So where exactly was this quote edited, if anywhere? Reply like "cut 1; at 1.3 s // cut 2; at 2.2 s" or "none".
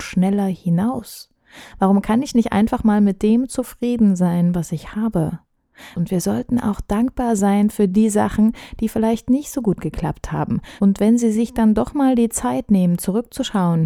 cut 1; at 5.9 s // cut 2; at 10.8 s